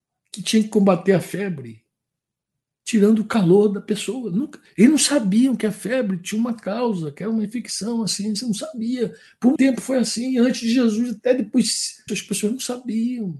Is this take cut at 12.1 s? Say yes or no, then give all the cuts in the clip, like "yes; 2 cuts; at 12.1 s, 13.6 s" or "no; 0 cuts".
yes; 2 cuts; at 9.6 s, 12.1 s